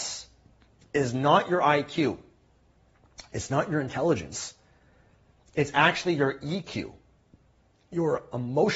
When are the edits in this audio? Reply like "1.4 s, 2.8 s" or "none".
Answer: none

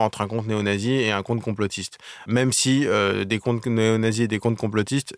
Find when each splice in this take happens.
none

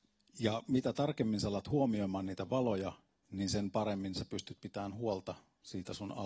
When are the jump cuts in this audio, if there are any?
none

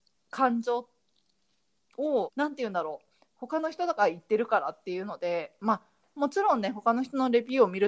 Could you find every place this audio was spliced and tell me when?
2.3 s

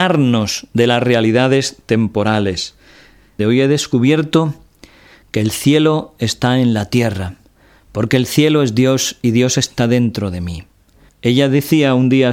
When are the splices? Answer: 3.4 s, 11.1 s

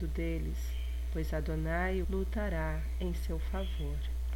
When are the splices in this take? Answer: 2.0 s

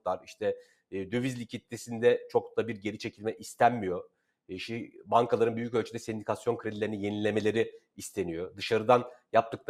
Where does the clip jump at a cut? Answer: none

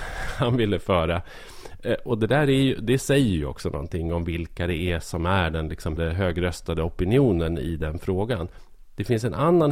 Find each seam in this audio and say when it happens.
6.0 s

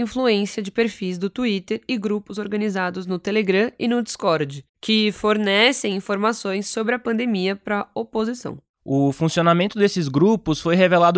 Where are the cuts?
none

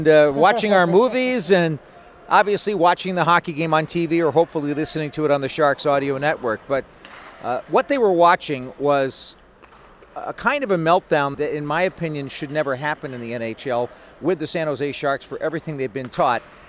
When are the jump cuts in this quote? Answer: 11.3 s

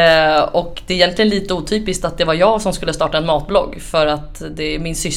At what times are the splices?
none

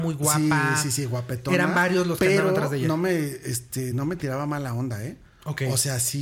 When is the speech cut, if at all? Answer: none

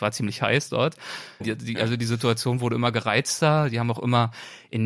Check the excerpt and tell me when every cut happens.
1.4 s

